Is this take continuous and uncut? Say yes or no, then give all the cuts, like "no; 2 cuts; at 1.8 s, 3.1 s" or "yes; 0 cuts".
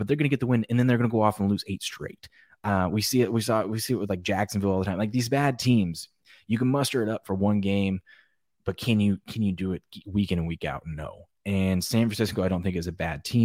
yes; 0 cuts